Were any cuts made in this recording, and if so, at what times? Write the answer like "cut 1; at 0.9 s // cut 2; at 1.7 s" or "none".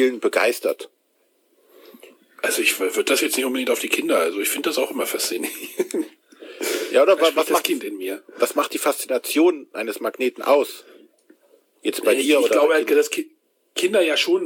none

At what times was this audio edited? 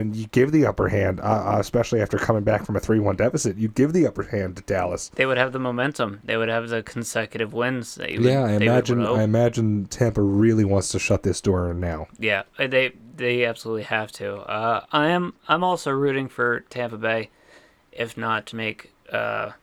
cut 1; at 18.5 s

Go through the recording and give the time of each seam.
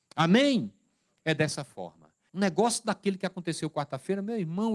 cut 1; at 2.3 s

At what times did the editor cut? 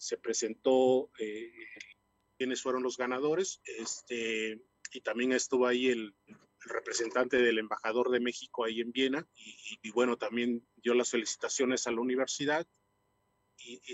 cut 1; at 3.6 s // cut 2; at 6.3 s // cut 3; at 9.3 s

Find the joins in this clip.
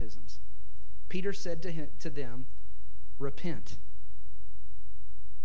none

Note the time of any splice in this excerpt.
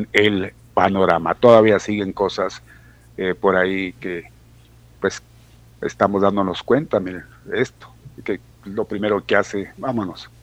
none

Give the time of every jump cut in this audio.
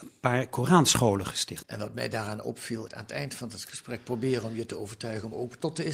cut 1; at 1.6 s // cut 2; at 2.9 s

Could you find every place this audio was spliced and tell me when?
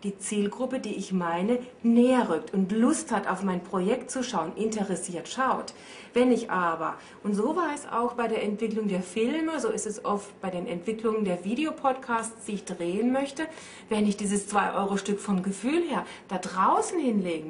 none

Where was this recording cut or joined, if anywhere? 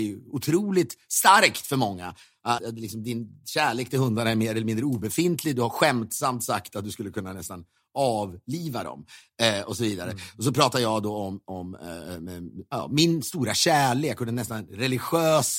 cut 1; at 2.6 s

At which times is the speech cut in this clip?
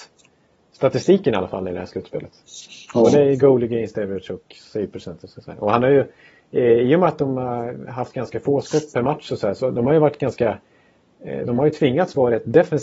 none

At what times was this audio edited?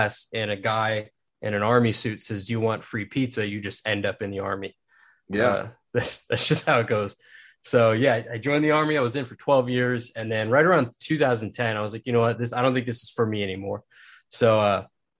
none

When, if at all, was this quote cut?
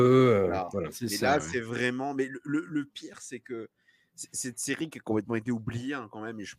none

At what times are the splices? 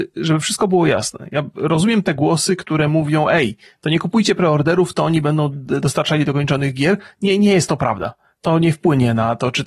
none

